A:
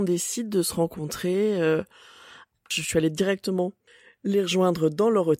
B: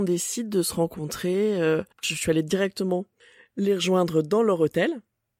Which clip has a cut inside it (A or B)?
B